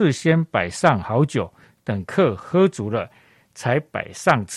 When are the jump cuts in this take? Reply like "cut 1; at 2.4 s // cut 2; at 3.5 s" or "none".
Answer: none